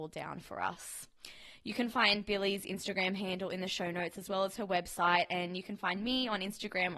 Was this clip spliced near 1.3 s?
no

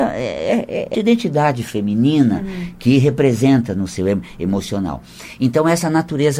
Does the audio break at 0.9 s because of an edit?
yes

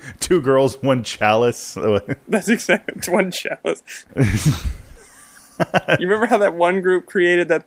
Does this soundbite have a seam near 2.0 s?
no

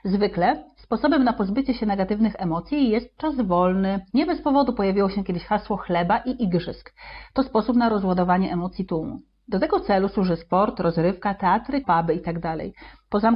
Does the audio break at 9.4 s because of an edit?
no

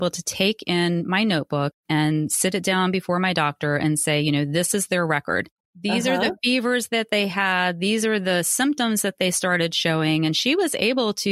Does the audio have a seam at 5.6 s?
yes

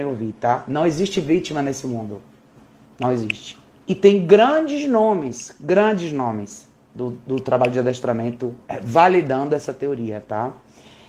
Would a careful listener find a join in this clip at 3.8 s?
yes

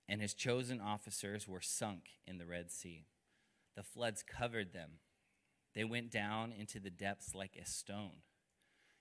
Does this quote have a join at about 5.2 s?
no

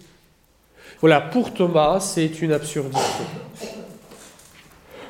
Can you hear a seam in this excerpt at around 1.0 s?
yes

